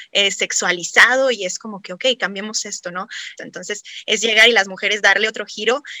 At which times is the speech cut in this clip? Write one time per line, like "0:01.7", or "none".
0:03.4